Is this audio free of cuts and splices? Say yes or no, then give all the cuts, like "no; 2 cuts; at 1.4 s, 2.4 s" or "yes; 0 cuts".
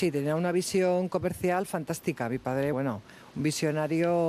no; 1 cut; at 2.7 s